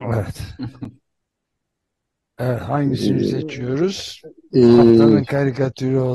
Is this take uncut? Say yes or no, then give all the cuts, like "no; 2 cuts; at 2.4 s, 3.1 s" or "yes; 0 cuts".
yes; 0 cuts